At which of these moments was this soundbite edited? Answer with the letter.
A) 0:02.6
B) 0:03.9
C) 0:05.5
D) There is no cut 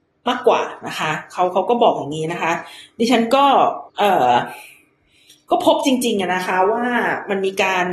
B